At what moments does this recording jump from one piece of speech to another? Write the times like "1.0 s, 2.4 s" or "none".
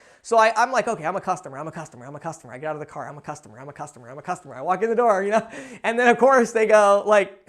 none